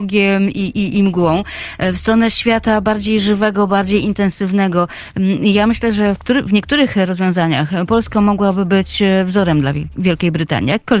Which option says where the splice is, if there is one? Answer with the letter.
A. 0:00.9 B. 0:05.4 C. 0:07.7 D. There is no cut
D